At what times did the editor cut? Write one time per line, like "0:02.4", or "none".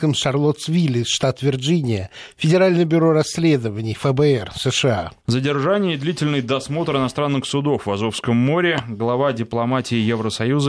0:05.2

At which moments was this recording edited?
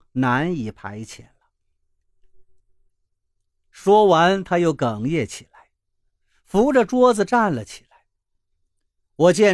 0:02.9

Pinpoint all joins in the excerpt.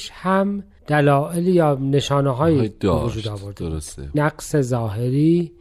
0:04.1

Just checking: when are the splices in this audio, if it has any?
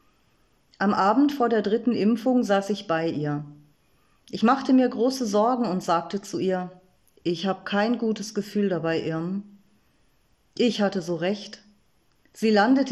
none

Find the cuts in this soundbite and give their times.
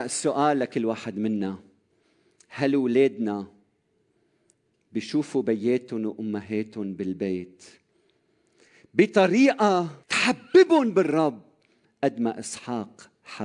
0:10.0

